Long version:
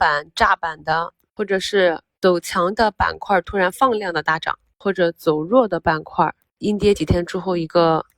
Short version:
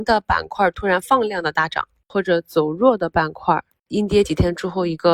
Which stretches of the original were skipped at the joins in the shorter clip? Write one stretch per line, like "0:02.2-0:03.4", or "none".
none